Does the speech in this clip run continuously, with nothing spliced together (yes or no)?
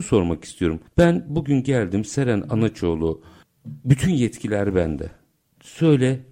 yes